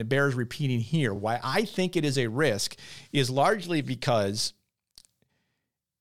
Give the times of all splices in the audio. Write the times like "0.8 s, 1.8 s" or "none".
none